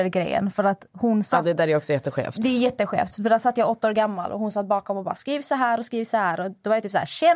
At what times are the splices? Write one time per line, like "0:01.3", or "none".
none